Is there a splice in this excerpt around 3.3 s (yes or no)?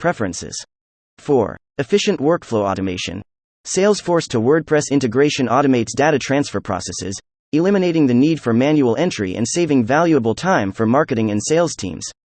no